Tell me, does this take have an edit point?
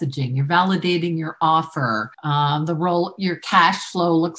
yes; 1 cut; at 2.1 s

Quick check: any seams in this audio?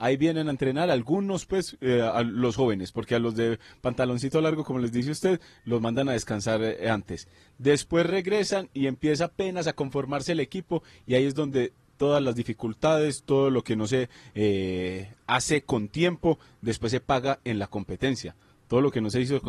no; 0 cuts

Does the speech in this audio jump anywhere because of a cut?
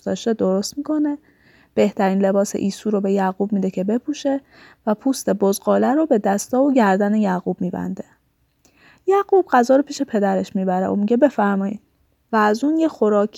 yes; 1 cut; at 12.3 s

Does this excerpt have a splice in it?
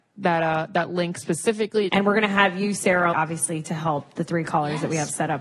yes; 2 cuts; at 1.9 s, 3.1 s

